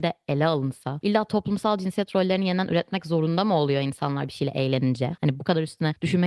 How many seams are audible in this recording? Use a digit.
1